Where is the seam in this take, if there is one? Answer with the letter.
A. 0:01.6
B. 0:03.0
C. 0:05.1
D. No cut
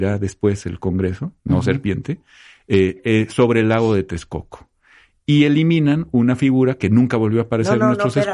D